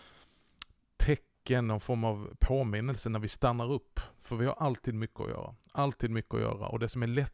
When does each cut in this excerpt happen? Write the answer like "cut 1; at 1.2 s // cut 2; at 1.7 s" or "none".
none